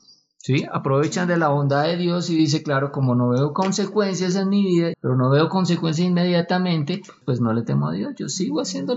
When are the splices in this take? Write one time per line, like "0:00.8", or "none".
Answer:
0:04.9
0:07.2